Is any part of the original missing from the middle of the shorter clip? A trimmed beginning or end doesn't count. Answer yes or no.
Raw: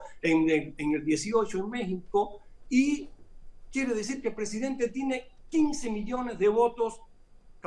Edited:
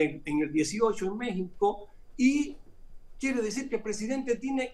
no